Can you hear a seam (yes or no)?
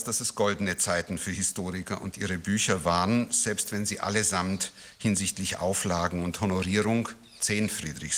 no